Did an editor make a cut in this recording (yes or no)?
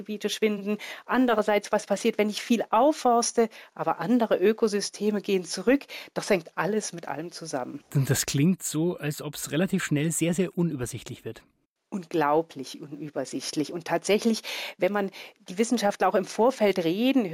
no